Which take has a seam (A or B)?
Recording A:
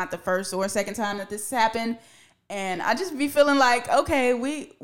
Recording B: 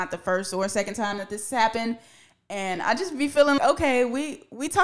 B